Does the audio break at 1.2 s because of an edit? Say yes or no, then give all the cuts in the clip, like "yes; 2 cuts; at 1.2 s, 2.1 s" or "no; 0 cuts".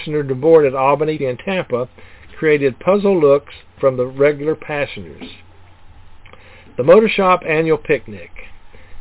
yes; 1 cut; at 1.2 s